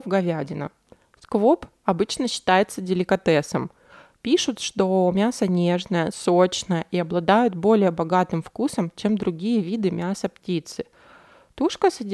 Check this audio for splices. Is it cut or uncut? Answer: uncut